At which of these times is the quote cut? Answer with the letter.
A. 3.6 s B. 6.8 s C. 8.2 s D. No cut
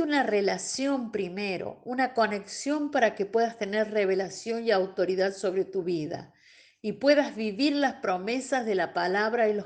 D